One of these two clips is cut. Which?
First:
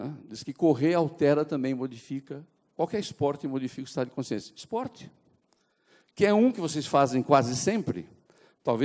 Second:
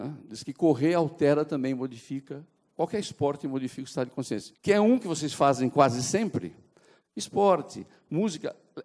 second; 2 cuts; at 4.5 s, 7.0 s

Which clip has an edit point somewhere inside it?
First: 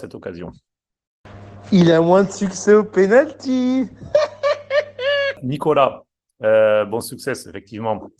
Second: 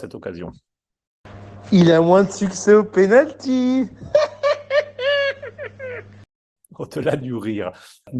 first; 1 cut; at 5.4 s

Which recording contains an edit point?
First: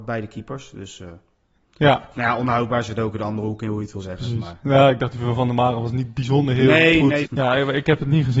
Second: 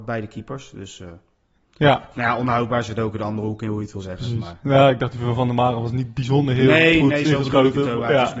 first; 1 cut; at 7.2 s

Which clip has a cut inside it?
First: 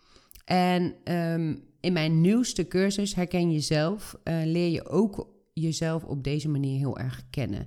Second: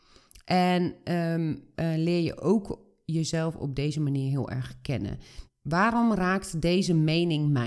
second; 2 cuts; at 1.7 s, 5.5 s

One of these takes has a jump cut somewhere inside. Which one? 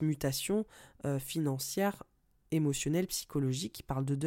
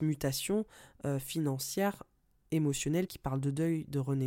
second; 1 cut; at 3.1 s

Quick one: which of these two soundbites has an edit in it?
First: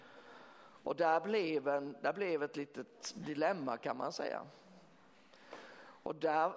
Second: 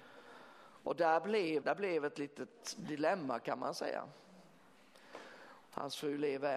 second; 2 cuts; at 1.6 s, 5.6 s

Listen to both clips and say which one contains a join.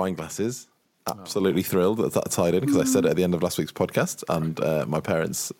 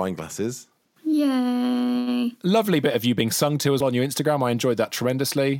second; 2 cuts; at 1.0 s, 3.8 s

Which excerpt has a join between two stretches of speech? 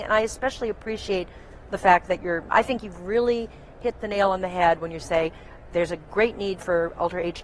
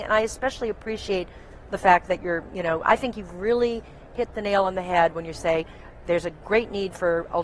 first; 1 cut; at 2.5 s

